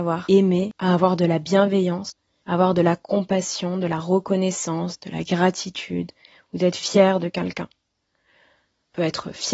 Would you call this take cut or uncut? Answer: uncut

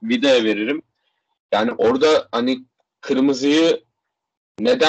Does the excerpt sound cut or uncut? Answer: uncut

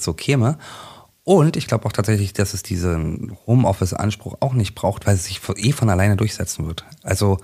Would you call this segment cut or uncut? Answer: uncut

